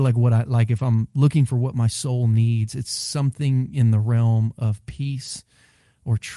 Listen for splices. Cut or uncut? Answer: uncut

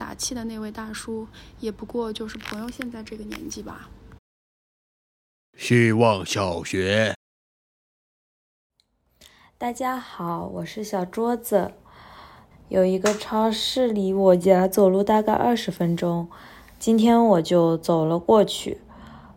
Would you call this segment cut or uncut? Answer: cut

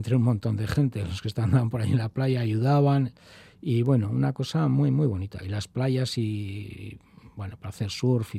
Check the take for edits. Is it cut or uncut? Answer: uncut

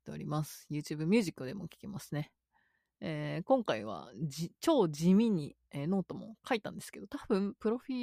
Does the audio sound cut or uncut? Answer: uncut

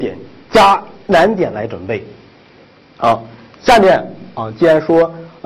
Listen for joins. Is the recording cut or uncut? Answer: uncut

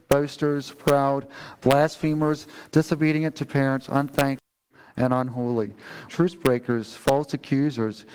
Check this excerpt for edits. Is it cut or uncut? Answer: cut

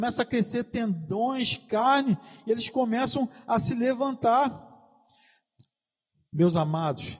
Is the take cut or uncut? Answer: uncut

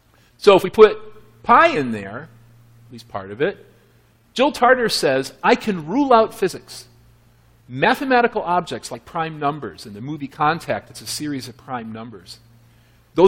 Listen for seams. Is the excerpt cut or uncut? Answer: uncut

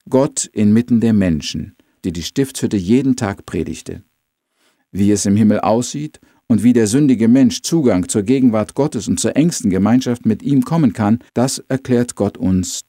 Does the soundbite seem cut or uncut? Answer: cut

